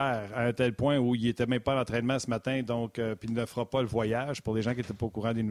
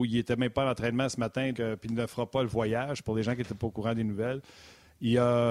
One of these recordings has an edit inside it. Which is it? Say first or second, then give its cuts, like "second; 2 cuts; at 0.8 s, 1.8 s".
second; 1 cut; at 1.5 s